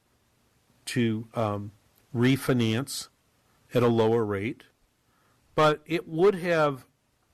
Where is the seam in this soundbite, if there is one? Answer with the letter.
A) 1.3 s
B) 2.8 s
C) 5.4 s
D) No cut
C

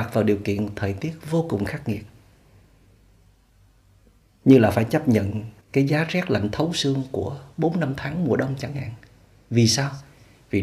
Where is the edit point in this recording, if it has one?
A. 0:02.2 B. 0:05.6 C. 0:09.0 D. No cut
B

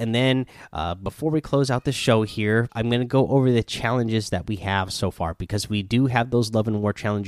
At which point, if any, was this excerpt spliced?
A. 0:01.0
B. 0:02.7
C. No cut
B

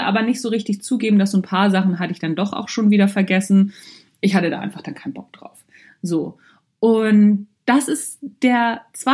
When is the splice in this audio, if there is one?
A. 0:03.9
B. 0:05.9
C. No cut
C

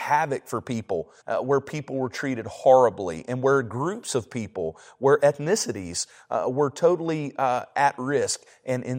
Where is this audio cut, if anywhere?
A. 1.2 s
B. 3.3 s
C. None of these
A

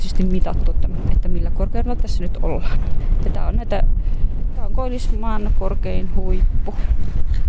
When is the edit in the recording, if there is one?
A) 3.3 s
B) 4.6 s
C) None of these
B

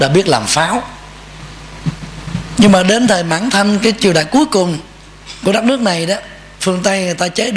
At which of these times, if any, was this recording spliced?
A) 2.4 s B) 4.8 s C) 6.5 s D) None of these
C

